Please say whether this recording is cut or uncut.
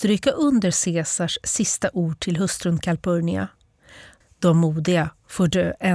cut